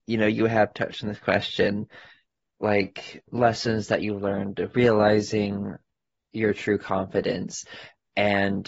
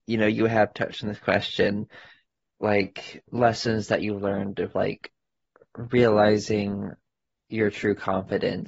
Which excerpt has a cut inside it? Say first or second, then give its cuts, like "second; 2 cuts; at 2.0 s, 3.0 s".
first; 1 cut; at 4.7 s